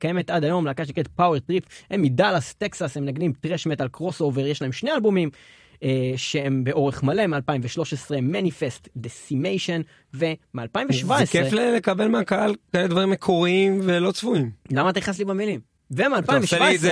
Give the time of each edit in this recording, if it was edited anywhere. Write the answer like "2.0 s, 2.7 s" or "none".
none